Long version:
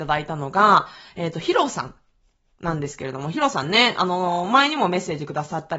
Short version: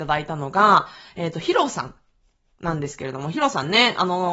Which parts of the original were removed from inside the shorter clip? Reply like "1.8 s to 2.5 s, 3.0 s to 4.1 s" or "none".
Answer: none